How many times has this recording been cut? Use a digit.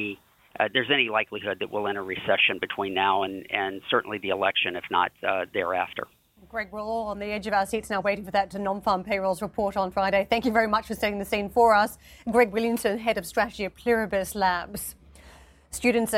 0